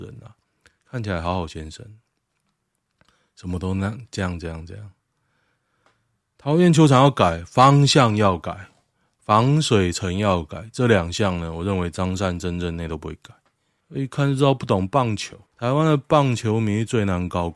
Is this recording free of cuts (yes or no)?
no